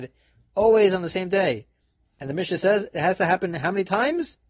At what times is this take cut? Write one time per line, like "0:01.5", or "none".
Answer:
none

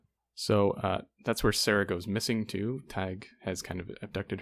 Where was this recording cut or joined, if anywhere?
none

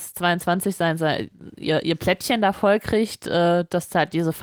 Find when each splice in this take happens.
none

